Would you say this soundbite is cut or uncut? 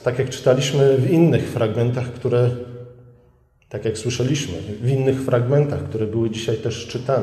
uncut